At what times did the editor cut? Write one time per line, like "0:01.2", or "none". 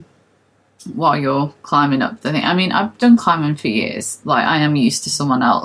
none